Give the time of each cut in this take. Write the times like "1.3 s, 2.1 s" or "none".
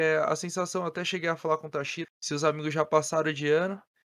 2.0 s